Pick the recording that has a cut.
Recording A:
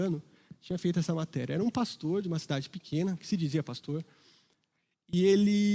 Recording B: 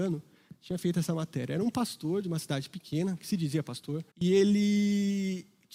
B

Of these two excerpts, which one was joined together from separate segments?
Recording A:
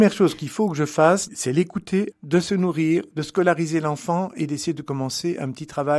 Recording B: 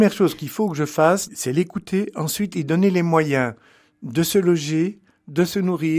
A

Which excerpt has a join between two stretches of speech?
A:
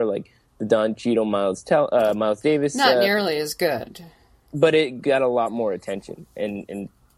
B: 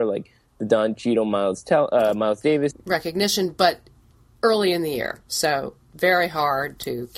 B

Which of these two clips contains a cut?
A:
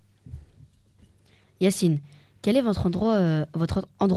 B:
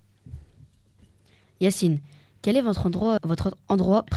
B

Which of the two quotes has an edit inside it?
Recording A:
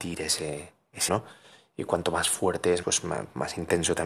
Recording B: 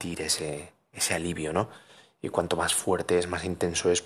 A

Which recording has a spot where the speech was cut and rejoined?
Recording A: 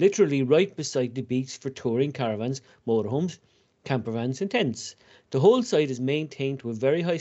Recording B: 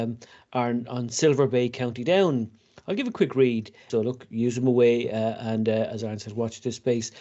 B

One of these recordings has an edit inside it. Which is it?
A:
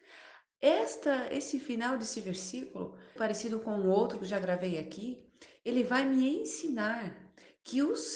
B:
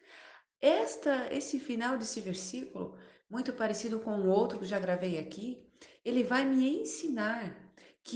A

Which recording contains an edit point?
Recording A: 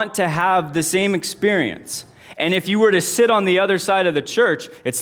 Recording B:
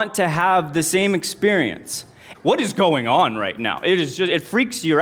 B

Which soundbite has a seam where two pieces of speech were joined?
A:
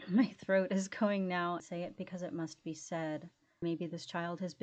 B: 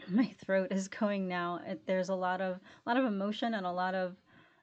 A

